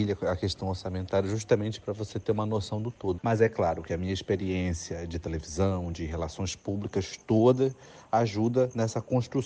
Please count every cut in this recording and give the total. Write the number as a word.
two